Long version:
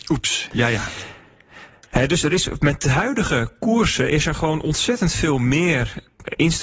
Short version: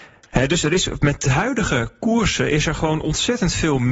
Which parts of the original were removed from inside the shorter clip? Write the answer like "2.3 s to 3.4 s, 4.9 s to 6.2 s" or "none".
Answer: none